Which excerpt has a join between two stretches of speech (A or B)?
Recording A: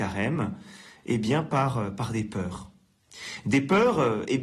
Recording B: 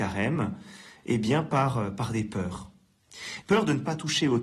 B